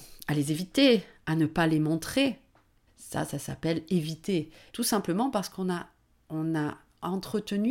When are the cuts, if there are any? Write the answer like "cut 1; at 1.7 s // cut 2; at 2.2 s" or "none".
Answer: cut 1; at 2.9 s // cut 2; at 4.7 s